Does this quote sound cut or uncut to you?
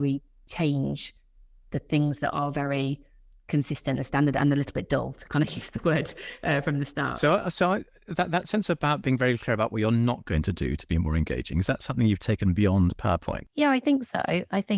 uncut